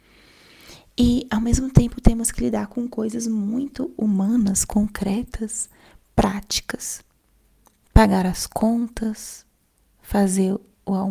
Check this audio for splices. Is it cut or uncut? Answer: uncut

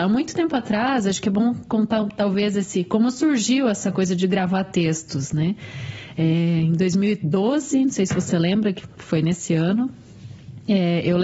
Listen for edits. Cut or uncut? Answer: uncut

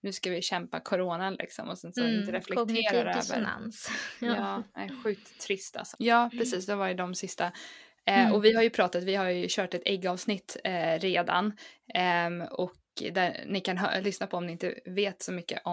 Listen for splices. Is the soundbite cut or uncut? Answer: cut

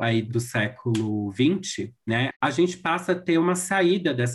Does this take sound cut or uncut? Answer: cut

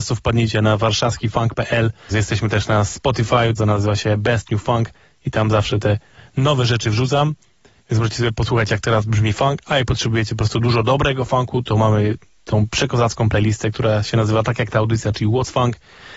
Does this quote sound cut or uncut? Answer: cut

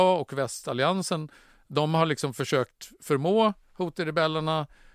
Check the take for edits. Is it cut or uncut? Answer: uncut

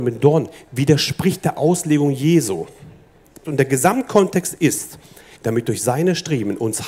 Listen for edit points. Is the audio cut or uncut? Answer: cut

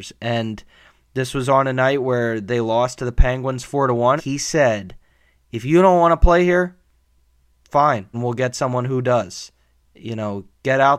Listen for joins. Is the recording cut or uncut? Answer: cut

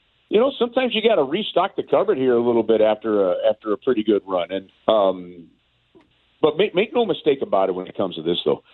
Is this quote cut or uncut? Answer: cut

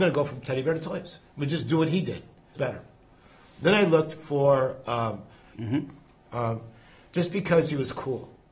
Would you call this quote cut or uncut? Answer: cut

